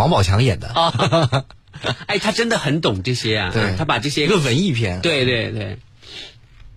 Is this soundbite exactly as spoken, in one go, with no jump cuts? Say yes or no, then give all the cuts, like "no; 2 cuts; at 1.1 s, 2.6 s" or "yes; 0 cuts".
no; 1 cut; at 0.9 s